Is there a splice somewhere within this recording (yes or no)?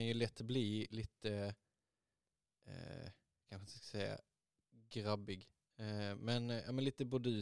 no